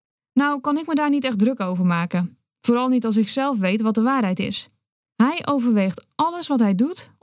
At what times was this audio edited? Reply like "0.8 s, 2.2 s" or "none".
5.0 s